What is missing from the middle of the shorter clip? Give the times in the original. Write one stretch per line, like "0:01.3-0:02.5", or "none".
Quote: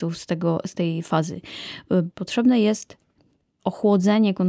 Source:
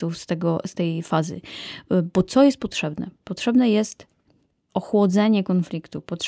0:02.1-0:03.2

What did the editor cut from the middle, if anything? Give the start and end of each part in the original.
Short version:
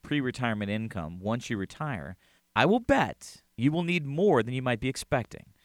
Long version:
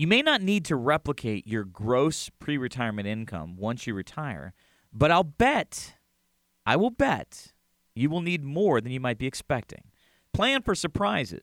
0:04.7-0:06.5
0:07.6-0:07.9

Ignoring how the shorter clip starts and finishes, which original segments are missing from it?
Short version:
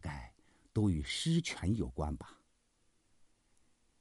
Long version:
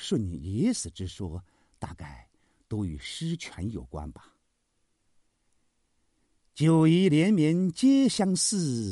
none

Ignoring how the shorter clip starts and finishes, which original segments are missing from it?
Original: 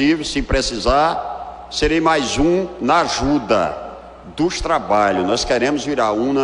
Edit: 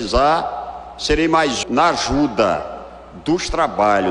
0:02.4-0:02.7

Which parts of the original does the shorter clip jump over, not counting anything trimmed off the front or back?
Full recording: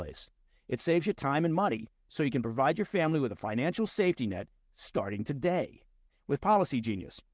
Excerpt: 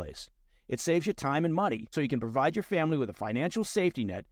0:01.9-0:02.1

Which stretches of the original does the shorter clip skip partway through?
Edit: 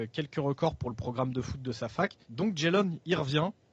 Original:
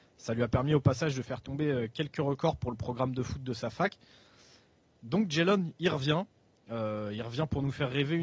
0:04.0-0:05.0

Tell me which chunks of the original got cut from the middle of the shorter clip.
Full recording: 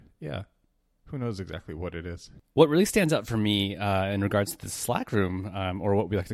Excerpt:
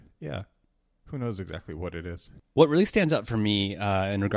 none

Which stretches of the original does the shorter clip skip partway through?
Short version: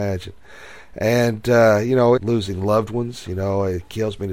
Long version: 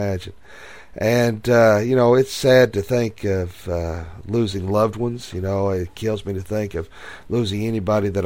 0:02.2-0:04.2

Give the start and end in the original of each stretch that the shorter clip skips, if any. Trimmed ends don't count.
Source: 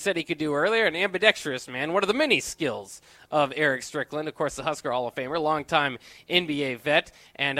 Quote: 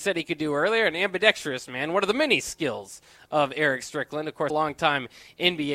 0:04.5-0:05.4

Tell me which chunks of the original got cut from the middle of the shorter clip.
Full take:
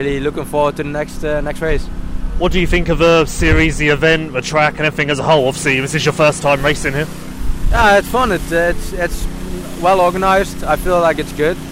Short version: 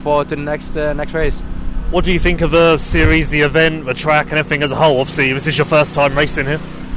none

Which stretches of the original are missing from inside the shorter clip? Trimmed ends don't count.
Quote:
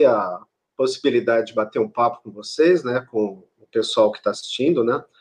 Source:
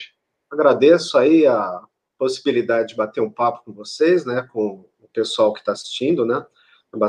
none

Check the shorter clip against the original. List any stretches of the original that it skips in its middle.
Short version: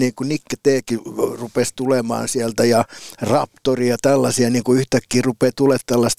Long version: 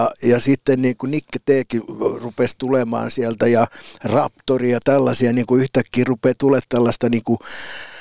none

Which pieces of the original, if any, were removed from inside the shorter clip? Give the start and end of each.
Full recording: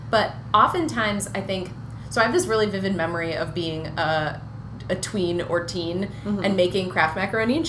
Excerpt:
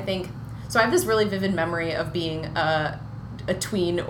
none

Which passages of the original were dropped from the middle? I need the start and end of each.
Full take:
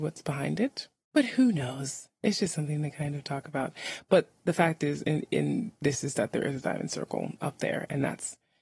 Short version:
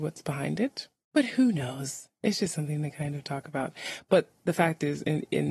none

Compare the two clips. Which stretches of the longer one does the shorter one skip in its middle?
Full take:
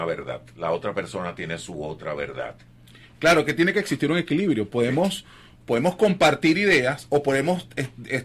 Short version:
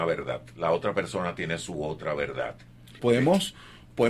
0:03.0-0:04.7

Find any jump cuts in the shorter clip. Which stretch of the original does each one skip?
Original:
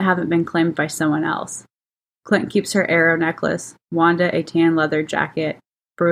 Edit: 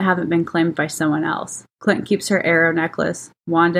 0:01.7-0:02.2

